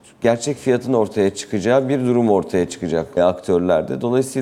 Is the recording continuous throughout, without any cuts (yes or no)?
no